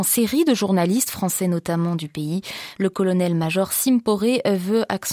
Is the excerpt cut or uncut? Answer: cut